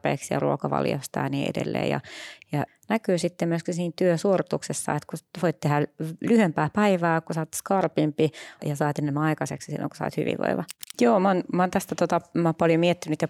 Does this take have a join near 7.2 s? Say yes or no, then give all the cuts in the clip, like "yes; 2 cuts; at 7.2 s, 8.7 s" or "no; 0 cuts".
no; 3 cuts; at 2.7 s, 8.6 s, 10.9 s